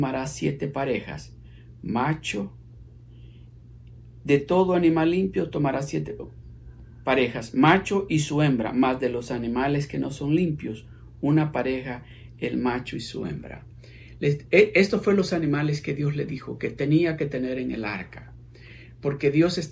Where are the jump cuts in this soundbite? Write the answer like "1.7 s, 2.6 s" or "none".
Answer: none

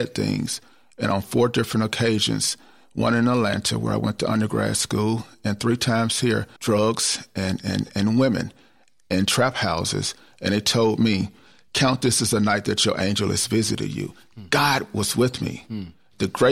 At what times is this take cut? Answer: 6.6 s

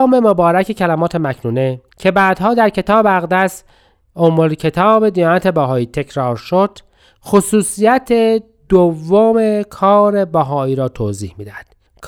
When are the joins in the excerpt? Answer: 1.9 s

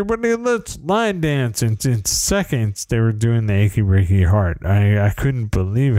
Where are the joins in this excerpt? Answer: 1.8 s

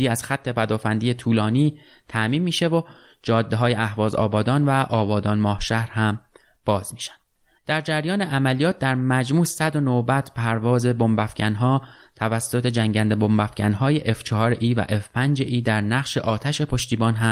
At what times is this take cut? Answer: 7.6 s

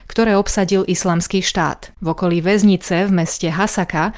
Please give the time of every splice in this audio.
1.9 s

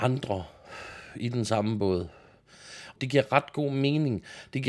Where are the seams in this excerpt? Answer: 3.0 s

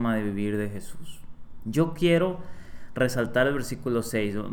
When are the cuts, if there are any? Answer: 1.6 s

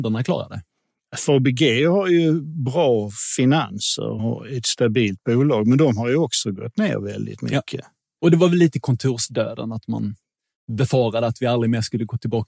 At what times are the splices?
4.2 s

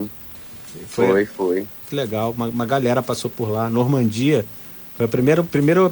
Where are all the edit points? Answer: 1.9 s

